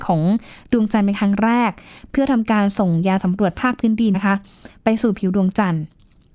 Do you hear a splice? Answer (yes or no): yes